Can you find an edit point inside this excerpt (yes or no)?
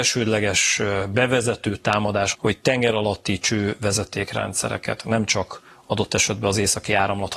yes